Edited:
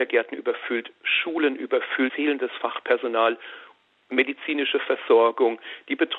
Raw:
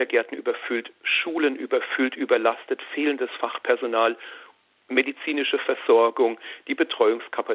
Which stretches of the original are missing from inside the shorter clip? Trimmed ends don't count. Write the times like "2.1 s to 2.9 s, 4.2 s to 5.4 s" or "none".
2.1 s to 2.9 s